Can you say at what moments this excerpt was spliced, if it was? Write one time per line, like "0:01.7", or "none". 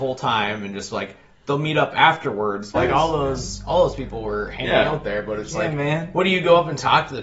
0:02.7
0:05.5